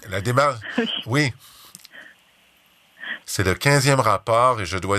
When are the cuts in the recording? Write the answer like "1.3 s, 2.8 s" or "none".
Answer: 3.2 s